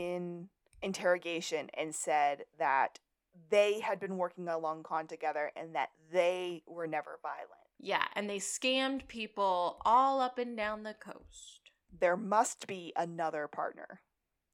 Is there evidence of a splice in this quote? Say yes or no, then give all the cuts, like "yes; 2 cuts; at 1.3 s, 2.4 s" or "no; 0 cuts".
no; 0 cuts